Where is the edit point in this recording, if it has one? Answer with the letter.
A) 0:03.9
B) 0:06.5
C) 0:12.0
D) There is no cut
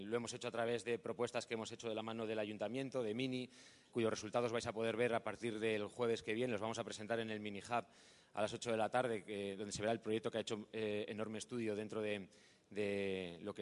A